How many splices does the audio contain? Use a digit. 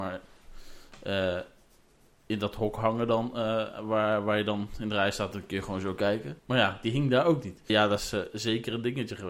2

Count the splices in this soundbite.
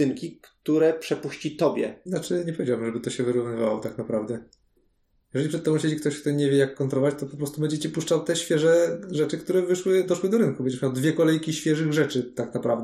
1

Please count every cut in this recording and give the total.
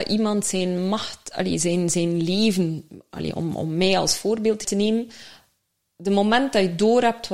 1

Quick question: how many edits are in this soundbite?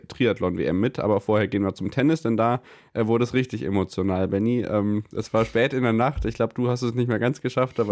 0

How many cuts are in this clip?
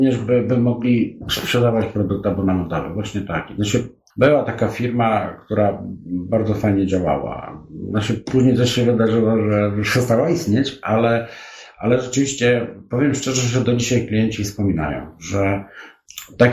0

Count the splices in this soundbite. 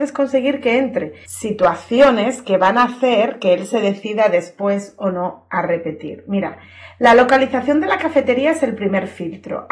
1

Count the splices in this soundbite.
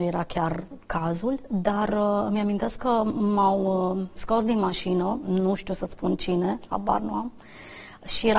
0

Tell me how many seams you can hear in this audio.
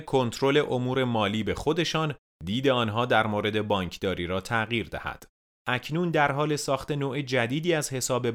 1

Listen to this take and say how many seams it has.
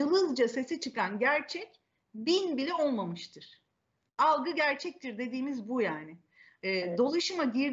0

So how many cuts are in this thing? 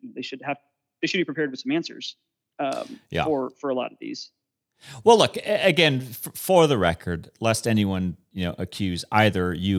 0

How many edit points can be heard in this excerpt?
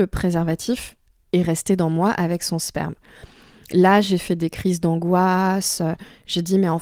0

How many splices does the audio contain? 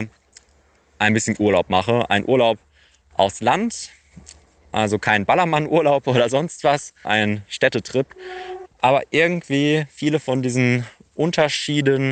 2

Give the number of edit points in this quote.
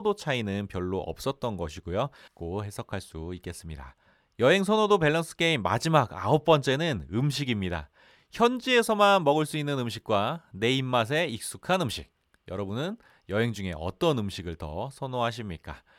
1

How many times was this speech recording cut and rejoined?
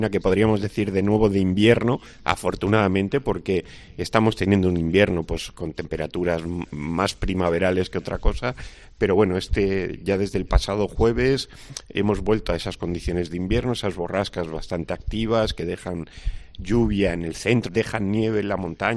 1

